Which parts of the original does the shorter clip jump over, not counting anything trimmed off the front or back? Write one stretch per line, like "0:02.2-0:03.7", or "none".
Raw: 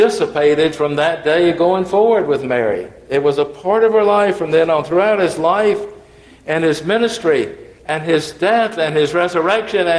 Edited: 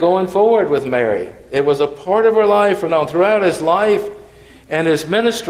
0:04.5-0:04.7